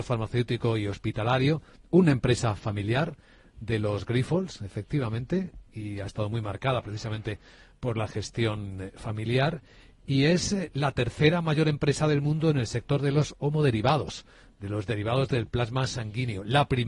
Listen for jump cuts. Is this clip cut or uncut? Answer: uncut